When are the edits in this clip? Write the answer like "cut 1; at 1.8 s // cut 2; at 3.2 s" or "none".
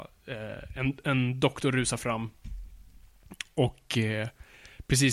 none